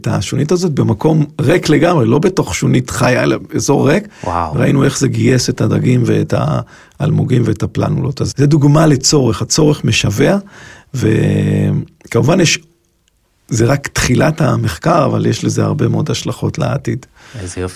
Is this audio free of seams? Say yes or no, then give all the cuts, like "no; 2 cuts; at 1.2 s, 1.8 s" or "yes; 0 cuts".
no; 1 cut; at 8.3 s